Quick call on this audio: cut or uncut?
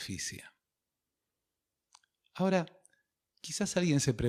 uncut